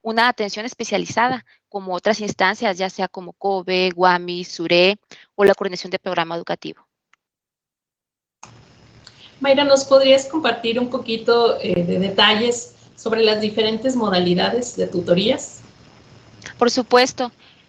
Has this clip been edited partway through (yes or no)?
no